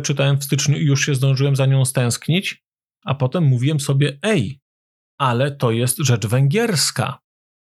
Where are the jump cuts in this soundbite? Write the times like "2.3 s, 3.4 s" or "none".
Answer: 3.0 s